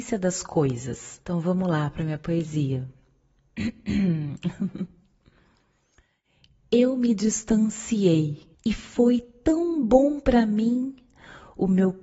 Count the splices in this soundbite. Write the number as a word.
two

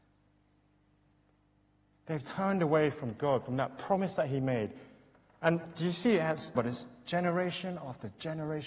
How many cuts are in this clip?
two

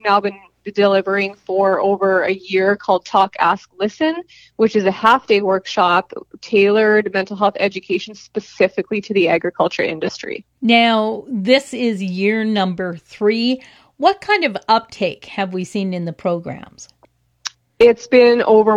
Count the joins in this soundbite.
zero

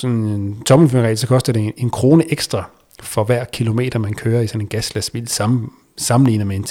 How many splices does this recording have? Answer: zero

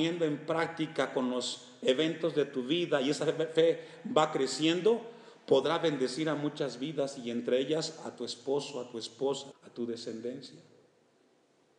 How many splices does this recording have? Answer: one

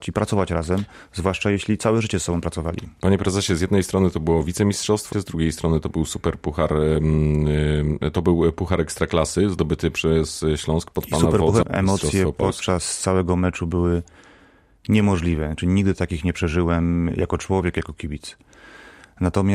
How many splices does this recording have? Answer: two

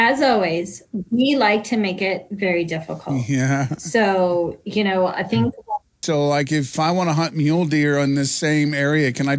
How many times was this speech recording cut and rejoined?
one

